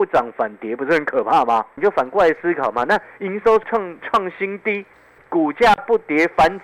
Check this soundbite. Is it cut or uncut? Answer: uncut